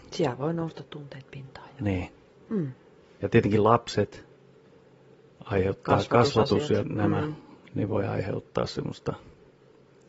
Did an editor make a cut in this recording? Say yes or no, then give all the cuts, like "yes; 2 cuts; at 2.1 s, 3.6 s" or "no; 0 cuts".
no; 0 cuts